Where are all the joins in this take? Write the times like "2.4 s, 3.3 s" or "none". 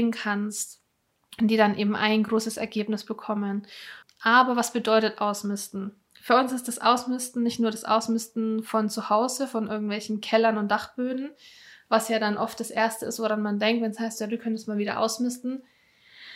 4.0 s